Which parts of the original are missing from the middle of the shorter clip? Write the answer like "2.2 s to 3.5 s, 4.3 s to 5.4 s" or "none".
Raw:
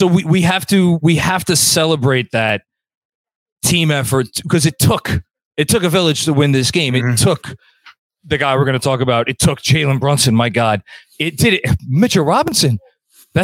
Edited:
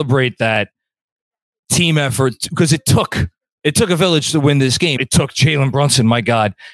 6.9 s to 9.2 s

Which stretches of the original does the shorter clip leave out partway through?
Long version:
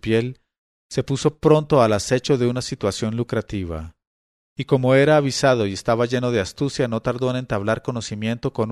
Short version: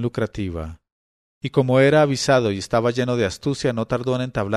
none

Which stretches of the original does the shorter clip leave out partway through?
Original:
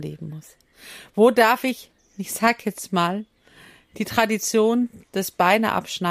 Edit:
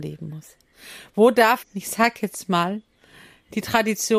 1.6 s to 2.1 s

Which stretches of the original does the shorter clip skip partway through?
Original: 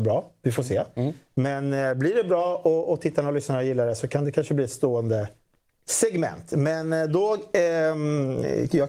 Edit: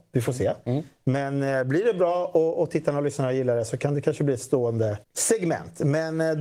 5.3 s to 5.8 s

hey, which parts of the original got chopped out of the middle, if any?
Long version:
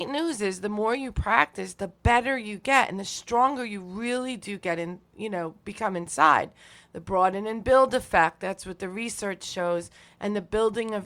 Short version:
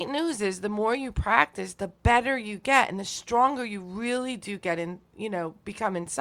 none

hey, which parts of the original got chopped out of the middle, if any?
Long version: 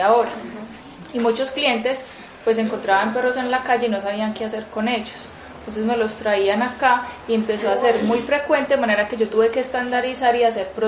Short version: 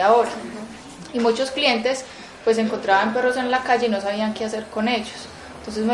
none

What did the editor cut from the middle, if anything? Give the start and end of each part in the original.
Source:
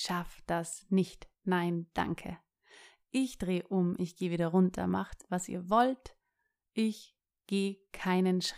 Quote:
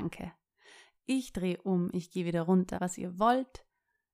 4.8 s to 5.3 s

